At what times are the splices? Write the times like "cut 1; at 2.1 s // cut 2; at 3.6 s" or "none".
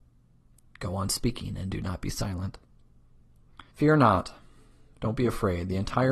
cut 1; at 3.7 s